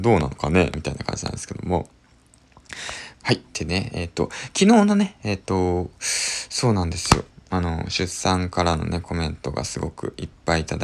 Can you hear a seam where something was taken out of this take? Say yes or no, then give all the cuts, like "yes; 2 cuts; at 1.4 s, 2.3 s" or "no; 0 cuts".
yes; 2 cuts; at 3.1 s, 7.3 s